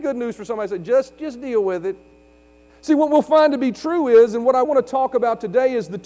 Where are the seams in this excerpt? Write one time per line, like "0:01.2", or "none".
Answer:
0:02.7
0:04.6